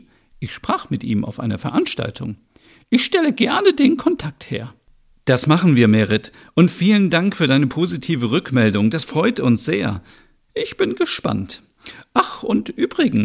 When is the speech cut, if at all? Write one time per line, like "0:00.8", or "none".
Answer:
none